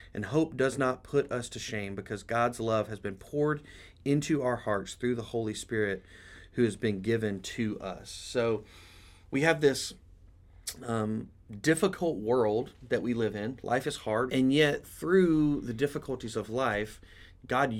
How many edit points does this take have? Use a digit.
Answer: 1